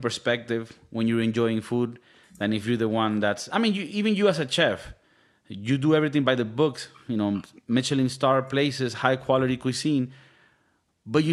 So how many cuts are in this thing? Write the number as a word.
zero